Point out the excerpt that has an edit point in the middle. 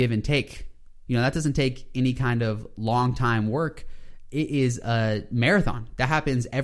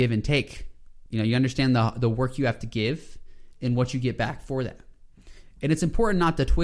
first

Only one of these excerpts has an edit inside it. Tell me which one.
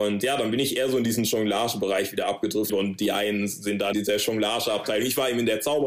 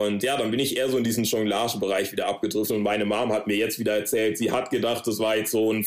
first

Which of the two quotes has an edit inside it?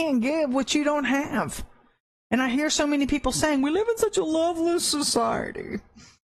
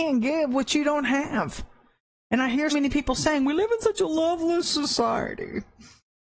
second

